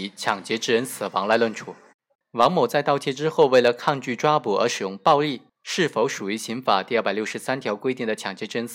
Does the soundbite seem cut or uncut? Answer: cut